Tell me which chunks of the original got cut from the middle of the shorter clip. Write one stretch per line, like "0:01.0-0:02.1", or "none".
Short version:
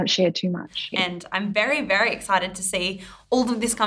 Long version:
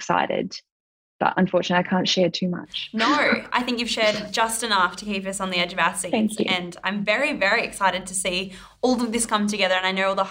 0:02.9-0:06.4